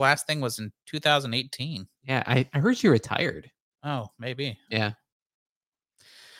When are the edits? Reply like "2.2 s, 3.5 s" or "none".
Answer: none

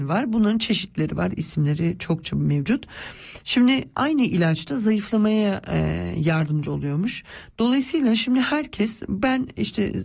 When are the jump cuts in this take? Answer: none

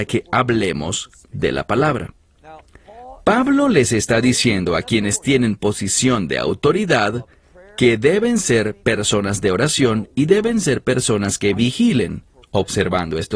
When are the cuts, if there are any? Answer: none

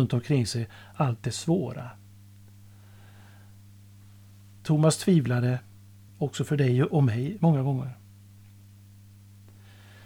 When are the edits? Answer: 0.9 s, 6.1 s

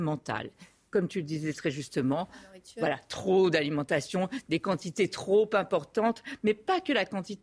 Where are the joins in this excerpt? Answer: none

